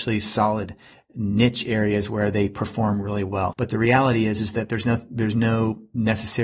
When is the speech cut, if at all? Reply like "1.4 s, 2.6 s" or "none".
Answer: 3.5 s